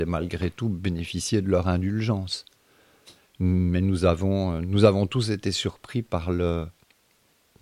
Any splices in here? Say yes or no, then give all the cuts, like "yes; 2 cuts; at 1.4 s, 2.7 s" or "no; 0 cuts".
no; 0 cuts